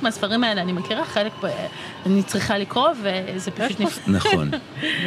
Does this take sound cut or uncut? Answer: cut